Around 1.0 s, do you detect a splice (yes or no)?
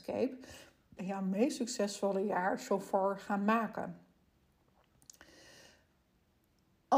yes